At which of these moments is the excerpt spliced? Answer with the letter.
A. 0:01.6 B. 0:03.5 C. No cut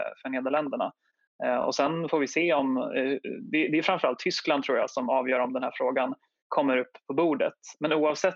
C